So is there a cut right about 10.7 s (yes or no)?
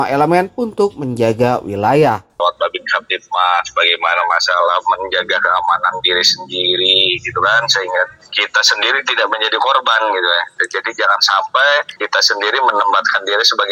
no